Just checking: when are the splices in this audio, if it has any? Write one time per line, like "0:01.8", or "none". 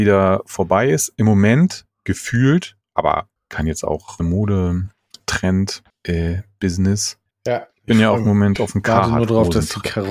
0:04.2
0:07.3

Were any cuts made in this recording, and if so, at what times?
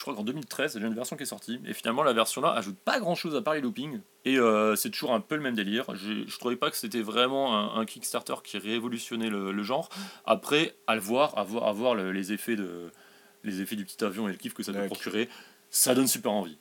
0:04.1

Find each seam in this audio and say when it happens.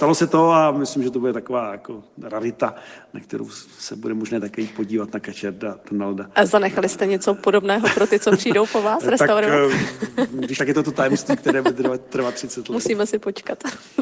0:10.6

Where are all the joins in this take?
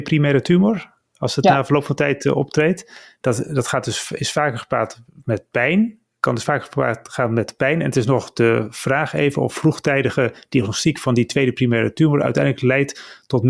none

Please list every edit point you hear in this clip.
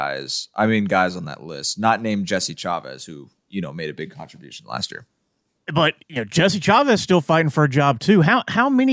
none

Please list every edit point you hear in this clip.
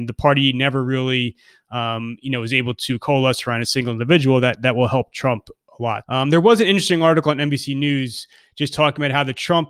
0:06.0

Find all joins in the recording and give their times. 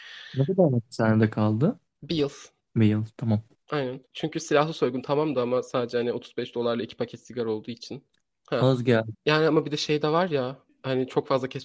0:04.1
0:09.1

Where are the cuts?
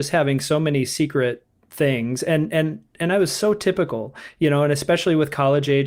none

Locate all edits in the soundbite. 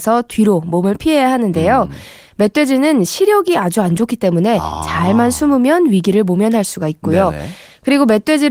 none

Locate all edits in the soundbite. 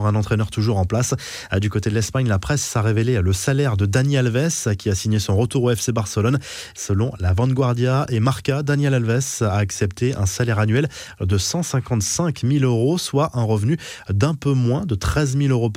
0:06.7

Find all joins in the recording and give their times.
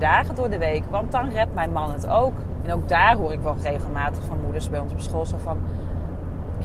0:02.6

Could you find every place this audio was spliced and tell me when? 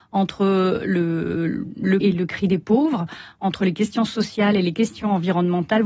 0:02.0

